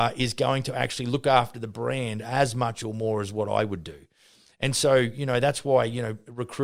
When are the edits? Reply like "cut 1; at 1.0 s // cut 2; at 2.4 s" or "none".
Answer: none